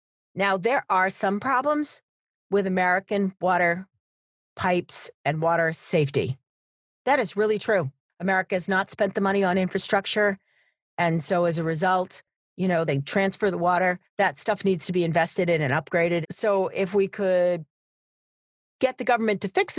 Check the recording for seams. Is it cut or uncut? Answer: cut